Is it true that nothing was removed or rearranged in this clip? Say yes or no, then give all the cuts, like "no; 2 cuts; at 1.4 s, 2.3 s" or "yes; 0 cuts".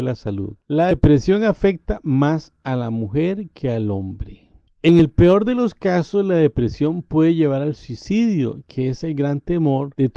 yes; 0 cuts